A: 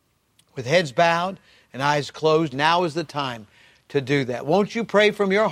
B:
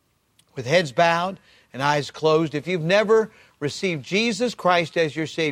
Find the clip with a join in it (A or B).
A